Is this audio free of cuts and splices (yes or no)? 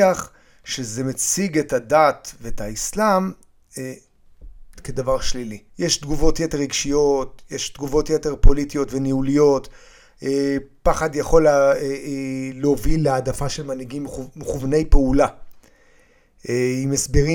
no